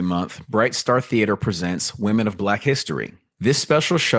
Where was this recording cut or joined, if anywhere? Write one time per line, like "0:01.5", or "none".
none